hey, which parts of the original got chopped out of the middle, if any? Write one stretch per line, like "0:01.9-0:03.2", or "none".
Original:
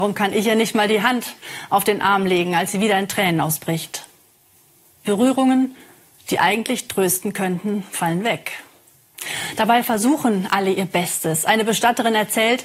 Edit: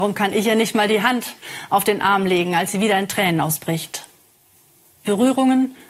none